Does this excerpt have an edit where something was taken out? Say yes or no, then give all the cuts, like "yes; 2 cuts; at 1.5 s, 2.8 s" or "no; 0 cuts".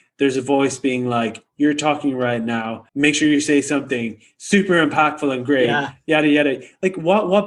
yes; 1 cut; at 2.9 s